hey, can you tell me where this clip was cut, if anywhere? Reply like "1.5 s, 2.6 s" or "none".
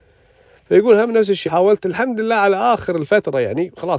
1.4 s